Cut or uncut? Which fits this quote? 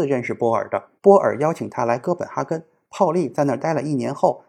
cut